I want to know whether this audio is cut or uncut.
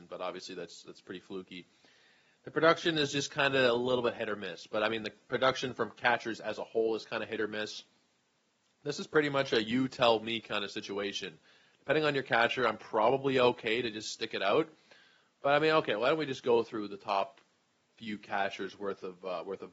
uncut